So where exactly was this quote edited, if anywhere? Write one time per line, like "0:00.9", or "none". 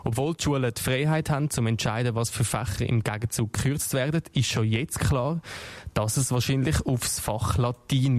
none